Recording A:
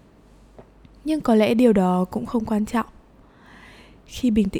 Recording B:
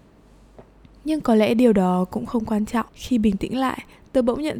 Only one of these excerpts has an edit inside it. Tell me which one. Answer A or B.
B